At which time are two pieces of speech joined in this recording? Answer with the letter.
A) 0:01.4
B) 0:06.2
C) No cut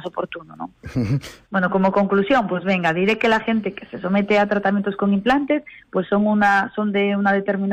A